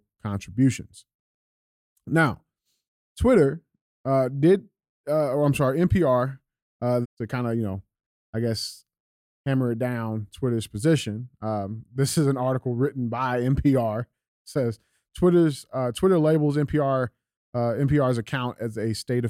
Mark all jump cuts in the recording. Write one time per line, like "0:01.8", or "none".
0:07.0

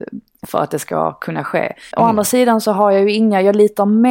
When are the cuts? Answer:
0:01.9

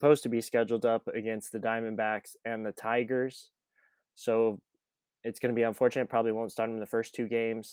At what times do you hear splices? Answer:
none

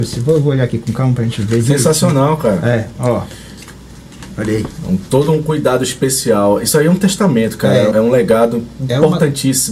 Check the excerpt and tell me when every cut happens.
0:07.9

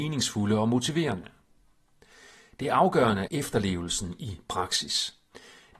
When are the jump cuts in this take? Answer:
0:03.3

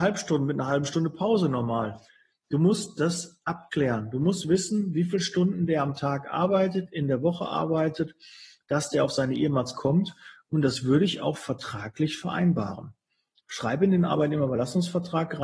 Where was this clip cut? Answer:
none

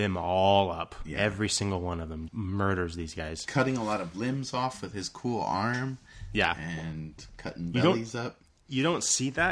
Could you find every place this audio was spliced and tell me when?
0:02.3

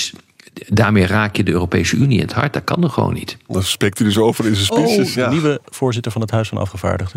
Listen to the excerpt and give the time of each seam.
0:03.5
0:05.1

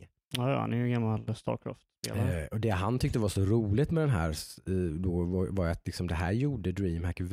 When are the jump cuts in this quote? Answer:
none

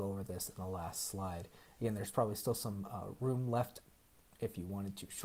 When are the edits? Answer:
none

